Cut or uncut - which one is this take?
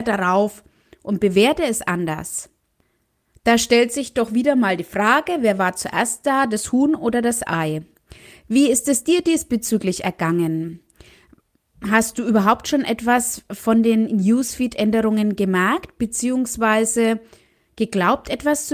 uncut